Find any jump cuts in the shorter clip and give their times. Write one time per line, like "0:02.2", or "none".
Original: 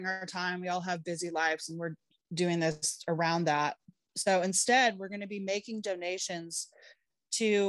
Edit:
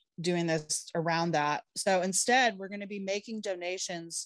0:01.7